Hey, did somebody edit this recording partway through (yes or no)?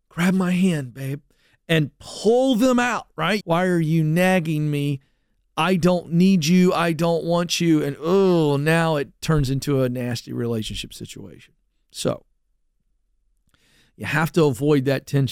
yes